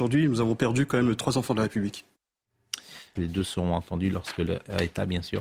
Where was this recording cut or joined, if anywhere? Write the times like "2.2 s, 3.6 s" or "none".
3.2 s